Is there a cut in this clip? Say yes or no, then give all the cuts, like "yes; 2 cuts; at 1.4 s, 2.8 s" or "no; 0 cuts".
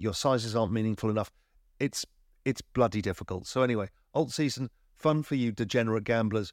no; 0 cuts